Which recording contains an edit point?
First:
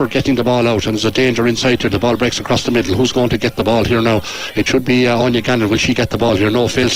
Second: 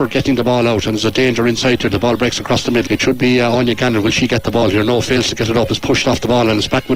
second; 1 cut; at 2.9 s

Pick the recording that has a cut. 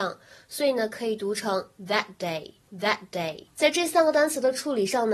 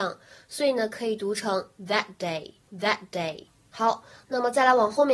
first; 1 cut; at 3.5 s

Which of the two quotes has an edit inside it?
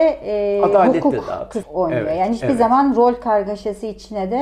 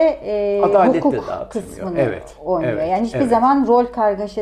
first; 1 cut; at 1.6 s

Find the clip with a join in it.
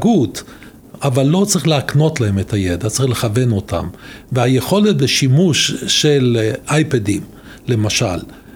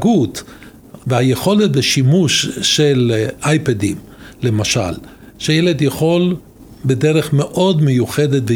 second; 1 cut; at 1.0 s

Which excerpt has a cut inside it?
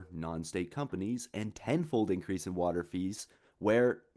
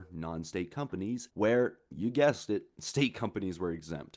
second; 1 cut; at 1.3 s

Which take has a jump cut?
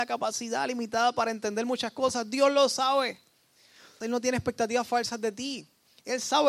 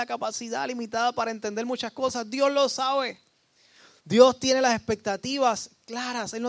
first; 1 cut; at 4.0 s

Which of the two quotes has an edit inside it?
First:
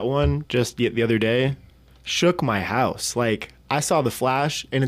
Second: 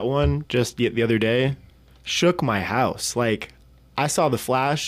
first; 1 cut; at 3.6 s

